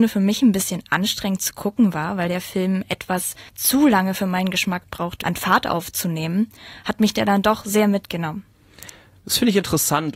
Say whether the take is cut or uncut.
cut